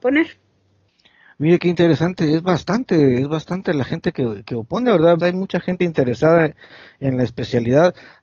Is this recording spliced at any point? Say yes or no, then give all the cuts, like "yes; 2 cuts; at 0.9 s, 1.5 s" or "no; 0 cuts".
yes; 1 cut; at 5.2 s